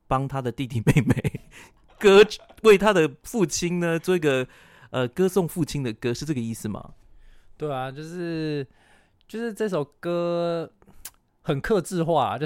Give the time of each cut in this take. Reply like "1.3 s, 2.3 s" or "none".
none